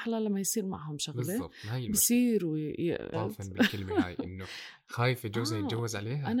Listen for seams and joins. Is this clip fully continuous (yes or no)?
no